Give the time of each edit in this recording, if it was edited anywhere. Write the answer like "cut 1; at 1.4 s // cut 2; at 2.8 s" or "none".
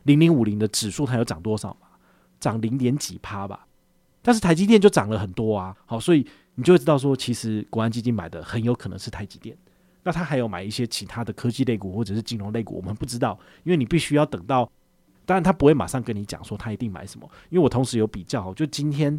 cut 1; at 15.1 s